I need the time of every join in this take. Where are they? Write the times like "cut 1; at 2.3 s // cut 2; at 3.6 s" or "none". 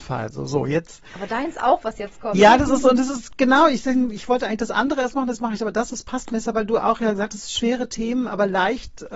none